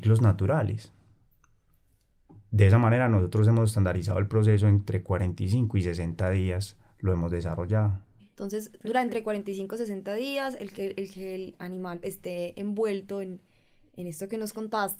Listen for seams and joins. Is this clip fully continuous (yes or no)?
no